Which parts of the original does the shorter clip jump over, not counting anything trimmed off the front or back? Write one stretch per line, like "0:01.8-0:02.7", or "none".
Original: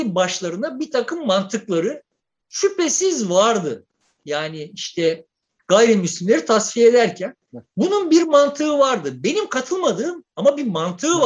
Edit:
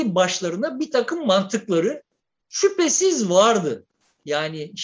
none